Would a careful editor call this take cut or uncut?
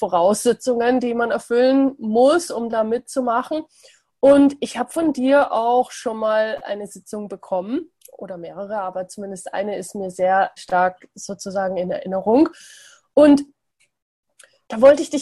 cut